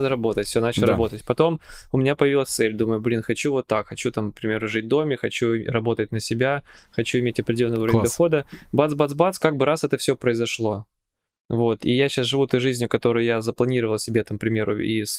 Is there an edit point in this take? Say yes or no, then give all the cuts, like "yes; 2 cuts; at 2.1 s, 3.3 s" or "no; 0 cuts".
no; 0 cuts